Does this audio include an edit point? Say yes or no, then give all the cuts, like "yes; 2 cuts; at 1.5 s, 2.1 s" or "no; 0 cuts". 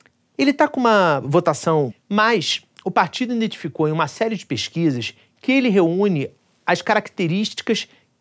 yes; 1 cut; at 1.9 s